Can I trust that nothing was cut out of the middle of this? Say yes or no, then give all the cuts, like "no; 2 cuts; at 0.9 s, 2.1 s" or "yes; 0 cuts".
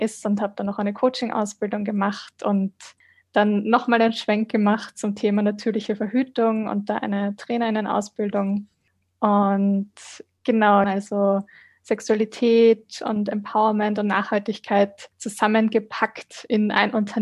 no; 1 cut; at 10.8 s